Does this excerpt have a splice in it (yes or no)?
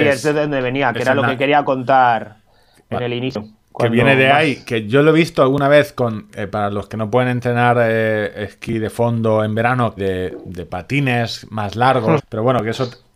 yes